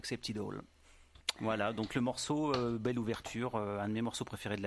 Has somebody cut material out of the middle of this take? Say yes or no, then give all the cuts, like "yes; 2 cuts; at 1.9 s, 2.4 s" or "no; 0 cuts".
no; 0 cuts